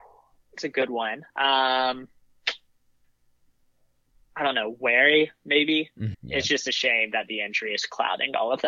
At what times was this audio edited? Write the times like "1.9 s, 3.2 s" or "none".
6.1 s